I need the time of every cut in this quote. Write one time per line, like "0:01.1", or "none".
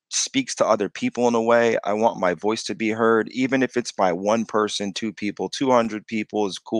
none